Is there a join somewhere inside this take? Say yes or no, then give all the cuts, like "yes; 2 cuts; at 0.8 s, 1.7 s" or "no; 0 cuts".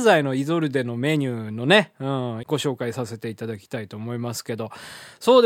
yes; 1 cut; at 2.4 s